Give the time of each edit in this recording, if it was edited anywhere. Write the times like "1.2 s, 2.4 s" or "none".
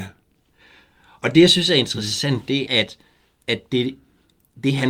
2.7 s